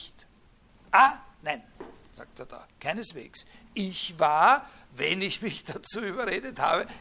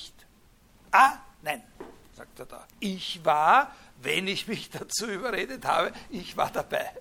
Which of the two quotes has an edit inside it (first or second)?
second